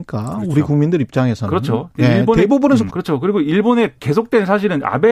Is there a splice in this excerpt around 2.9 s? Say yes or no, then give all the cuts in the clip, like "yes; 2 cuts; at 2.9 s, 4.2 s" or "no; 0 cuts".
yes; 1 cut; at 2.9 s